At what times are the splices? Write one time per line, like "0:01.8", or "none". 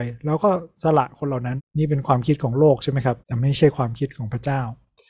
0:01.6
0:03.2